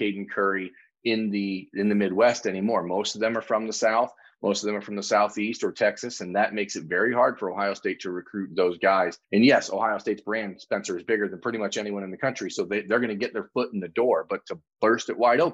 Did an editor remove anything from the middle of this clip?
yes; 1 cut; at 9.2 s

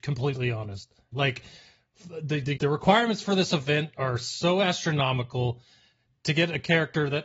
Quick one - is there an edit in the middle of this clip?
yes; 2 cuts; at 1.1 s, 2.6 s

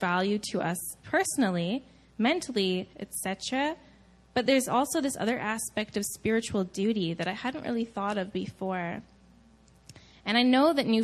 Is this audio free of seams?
no; 1 cut; at 2.9 s

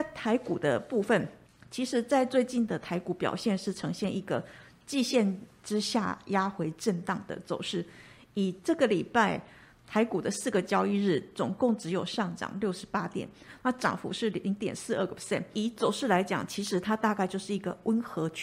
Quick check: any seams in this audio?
no; 0 cuts

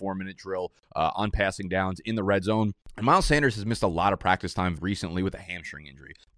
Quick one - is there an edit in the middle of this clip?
yes; 1 cut; at 4.8 s

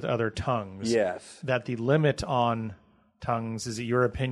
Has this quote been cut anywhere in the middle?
no; 0 cuts

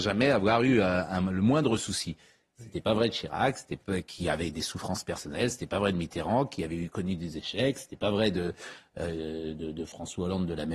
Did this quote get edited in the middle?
no; 0 cuts

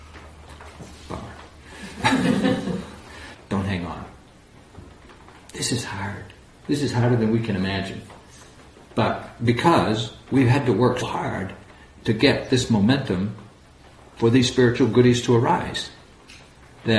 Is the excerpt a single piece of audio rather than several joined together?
no; 2 cuts; at 3.3 s, 11.0 s

